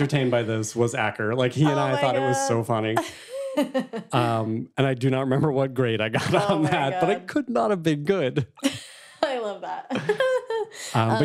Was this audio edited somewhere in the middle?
no; 0 cuts

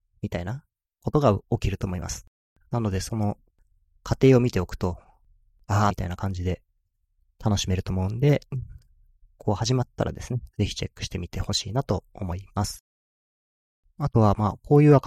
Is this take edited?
yes; 1 cut; at 5.9 s

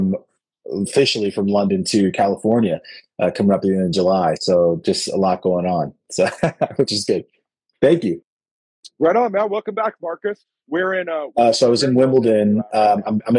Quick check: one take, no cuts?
yes; 0 cuts

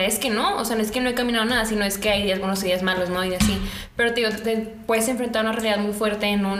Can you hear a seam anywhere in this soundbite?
no; 0 cuts

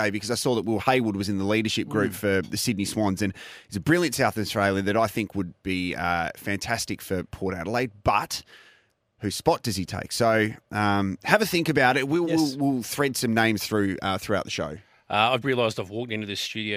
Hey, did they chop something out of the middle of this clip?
yes; 1 cut; at 15.4 s

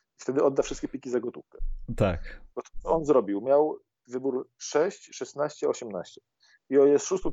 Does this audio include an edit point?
no; 0 cuts

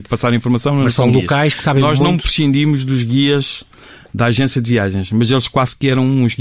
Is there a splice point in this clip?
no; 0 cuts

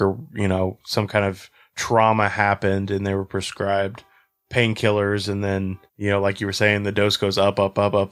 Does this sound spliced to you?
yes; 1 cut; at 5.9 s

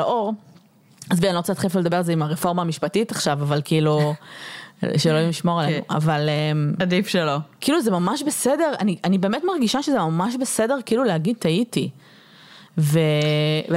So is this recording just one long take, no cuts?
yes; 0 cuts

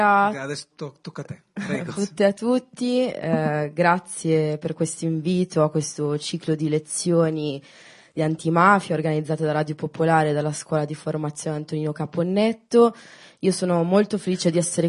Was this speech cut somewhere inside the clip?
yes; 1 cut; at 2.0 s

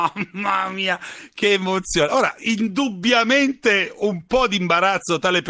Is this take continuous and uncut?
yes; 0 cuts

